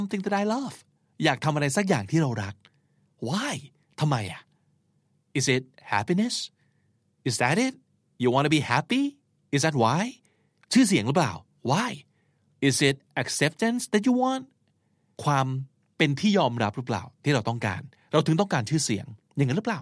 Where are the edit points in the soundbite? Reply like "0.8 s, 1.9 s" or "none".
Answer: 10.6 s